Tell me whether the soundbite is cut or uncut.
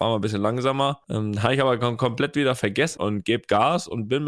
cut